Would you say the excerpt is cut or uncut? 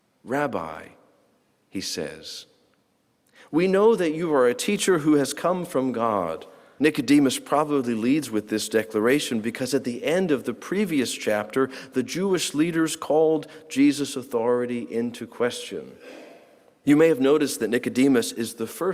cut